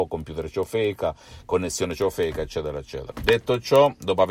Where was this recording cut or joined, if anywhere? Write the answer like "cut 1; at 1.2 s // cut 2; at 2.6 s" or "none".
cut 1; at 3.1 s

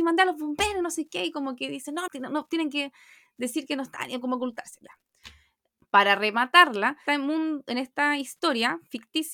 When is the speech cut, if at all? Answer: cut 1; at 2.1 s // cut 2; at 5.8 s // cut 3; at 7.1 s

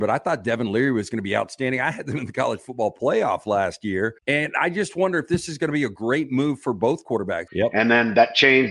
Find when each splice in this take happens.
cut 1; at 4.2 s // cut 2; at 7.5 s

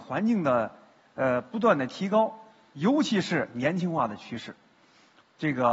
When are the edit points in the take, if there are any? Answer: cut 1; at 2.7 s

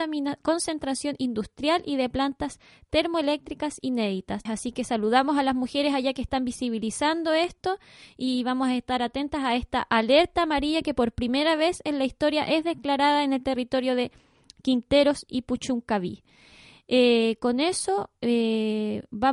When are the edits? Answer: cut 1; at 4.5 s

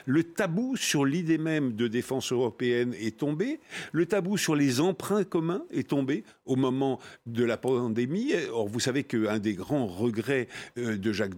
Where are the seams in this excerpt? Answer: none

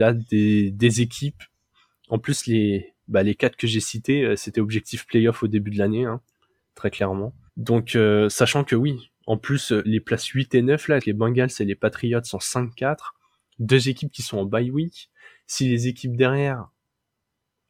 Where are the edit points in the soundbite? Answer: cut 1; at 7.5 s // cut 2; at 9.8 s // cut 3; at 11.0 s

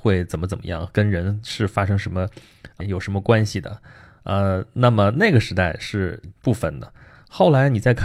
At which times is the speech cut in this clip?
cut 1; at 2.8 s

